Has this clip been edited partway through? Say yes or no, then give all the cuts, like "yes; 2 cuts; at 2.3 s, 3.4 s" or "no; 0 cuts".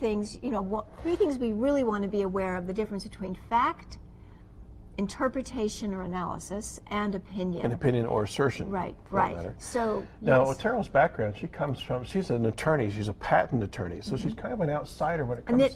no; 0 cuts